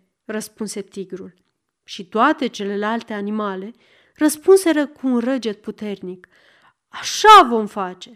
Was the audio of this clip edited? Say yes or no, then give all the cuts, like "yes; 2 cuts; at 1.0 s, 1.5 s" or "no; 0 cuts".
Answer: no; 0 cuts